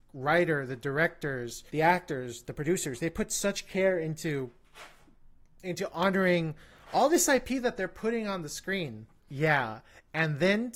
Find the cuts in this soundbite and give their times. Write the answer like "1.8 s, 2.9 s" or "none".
1.7 s, 9.2 s